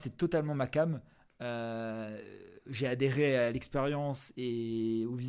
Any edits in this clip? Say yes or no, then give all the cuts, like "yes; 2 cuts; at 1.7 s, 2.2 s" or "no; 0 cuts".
no; 0 cuts